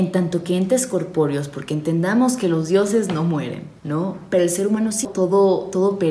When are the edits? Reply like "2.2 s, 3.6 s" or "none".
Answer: 3.8 s, 5.0 s